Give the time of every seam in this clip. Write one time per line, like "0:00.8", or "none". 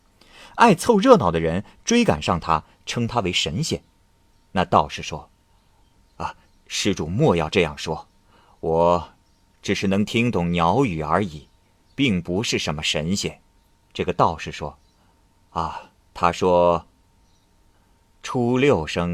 0:13.8
0:16.0